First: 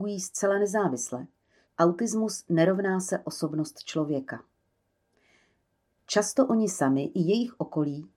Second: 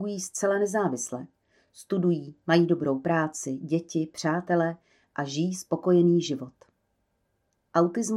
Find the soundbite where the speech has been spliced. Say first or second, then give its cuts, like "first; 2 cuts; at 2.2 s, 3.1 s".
first; 2 cuts; at 1.7 s, 6.0 s